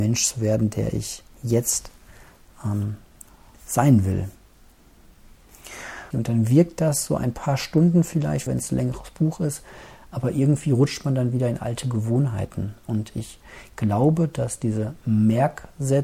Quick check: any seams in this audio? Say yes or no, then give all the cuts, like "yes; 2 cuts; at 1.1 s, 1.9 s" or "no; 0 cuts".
yes; 2 cuts; at 6.1 s, 8.5 s